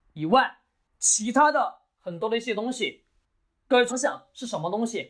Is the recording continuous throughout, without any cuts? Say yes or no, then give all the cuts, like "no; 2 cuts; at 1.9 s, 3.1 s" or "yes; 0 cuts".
no; 1 cut; at 3.9 s